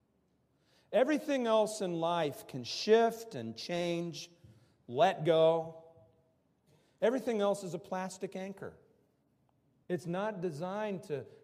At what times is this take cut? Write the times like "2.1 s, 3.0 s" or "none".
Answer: 9.8 s